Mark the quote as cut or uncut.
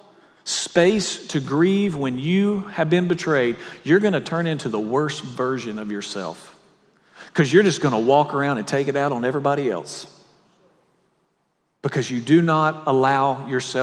uncut